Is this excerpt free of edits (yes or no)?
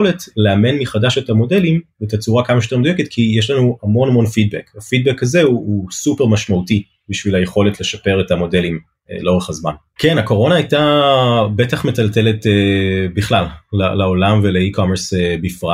no